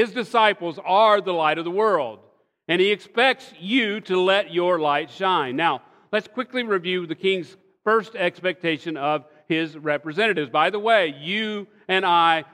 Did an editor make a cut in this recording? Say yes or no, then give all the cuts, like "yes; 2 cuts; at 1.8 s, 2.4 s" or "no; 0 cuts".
no; 0 cuts